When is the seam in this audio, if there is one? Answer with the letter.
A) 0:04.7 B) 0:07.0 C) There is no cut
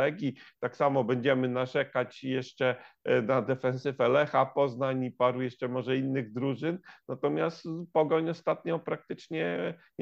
C